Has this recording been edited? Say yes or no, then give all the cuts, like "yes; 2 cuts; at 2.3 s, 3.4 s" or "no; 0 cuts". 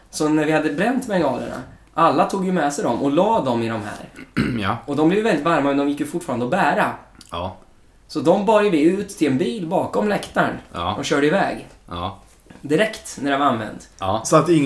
no; 0 cuts